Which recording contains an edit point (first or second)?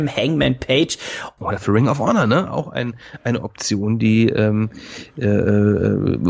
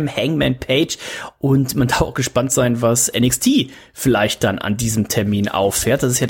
first